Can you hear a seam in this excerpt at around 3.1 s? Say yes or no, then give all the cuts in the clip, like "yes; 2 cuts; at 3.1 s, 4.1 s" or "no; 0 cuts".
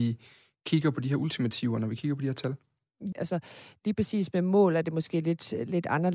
yes; 1 cut; at 3.1 s